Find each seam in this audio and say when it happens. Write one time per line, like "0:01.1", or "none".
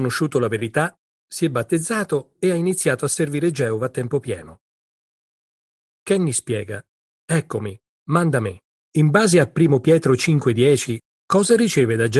0:01.1
0:07.1
0:08.8